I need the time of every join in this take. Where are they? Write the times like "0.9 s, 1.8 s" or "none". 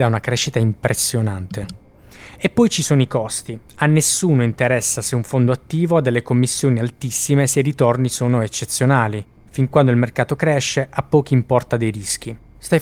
9.4 s